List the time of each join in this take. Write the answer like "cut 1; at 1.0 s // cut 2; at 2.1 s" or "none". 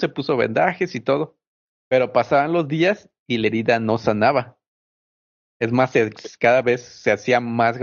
none